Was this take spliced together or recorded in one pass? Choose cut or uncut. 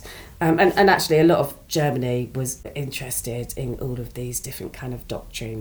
uncut